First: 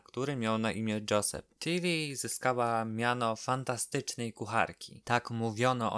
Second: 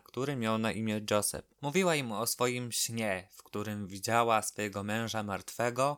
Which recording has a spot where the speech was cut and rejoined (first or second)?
second